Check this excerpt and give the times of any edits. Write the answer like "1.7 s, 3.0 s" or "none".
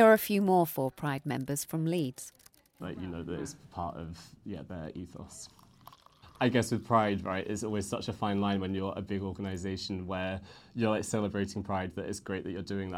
2.8 s